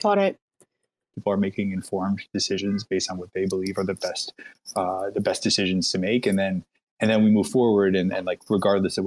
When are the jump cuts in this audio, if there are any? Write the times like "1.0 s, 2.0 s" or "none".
1.1 s